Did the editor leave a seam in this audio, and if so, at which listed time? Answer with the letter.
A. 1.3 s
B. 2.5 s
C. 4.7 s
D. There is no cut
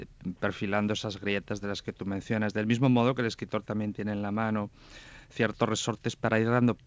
D